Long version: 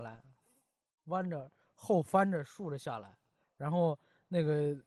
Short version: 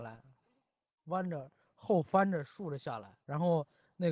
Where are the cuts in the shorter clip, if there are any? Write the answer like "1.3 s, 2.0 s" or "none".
3.2 s